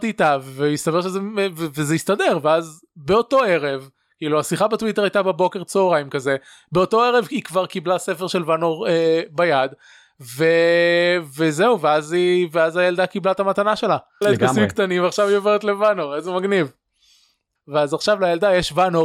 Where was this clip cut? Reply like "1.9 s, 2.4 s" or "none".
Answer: 14.2 s, 17.6 s